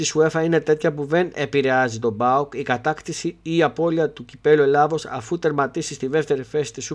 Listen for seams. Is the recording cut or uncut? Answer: uncut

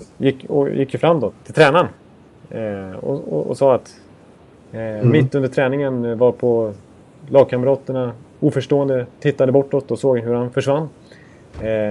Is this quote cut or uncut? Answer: cut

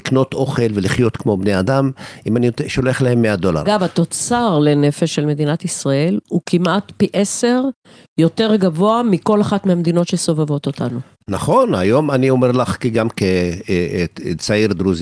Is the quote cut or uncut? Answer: cut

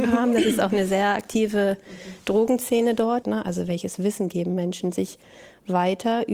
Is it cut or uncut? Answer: cut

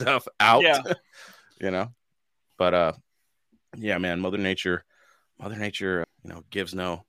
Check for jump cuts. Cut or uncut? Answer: cut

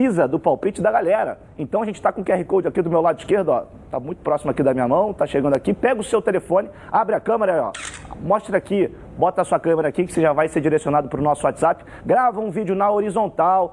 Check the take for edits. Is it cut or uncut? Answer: uncut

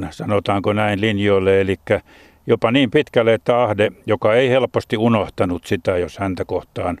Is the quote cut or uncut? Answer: uncut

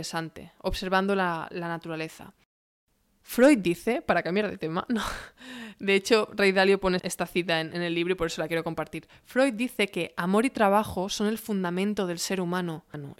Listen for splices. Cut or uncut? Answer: cut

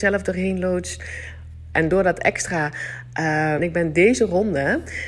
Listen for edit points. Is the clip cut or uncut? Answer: cut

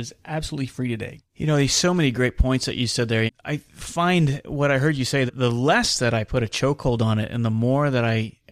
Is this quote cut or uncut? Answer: cut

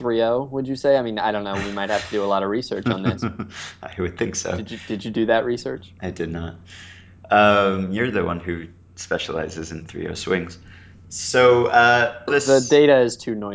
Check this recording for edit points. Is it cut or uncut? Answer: cut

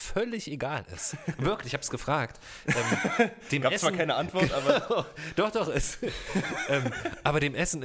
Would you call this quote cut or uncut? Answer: uncut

